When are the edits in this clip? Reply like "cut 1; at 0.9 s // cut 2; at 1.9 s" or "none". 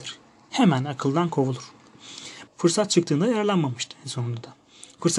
cut 1; at 2.5 s